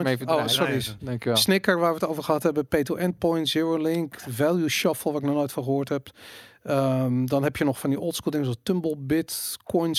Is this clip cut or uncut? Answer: uncut